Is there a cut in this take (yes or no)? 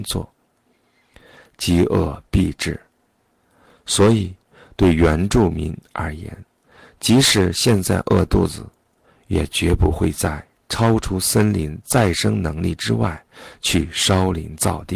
no